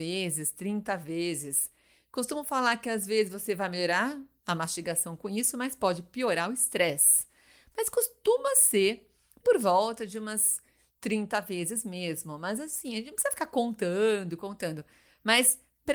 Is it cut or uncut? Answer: uncut